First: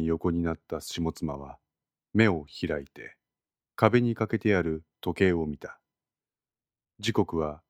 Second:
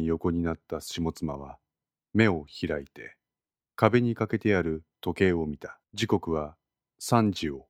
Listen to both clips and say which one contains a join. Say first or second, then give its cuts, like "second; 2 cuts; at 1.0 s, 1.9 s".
second; 1 cut; at 5.8 s